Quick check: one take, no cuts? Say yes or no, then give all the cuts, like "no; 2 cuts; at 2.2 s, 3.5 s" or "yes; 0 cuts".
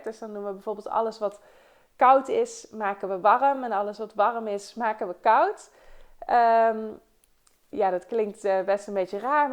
yes; 0 cuts